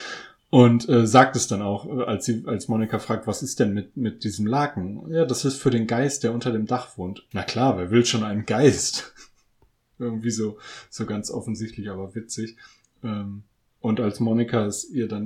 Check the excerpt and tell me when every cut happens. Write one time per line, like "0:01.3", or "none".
0:07.3